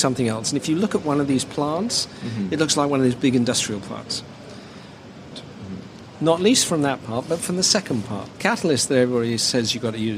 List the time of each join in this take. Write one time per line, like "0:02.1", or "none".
0:05.3
0:08.3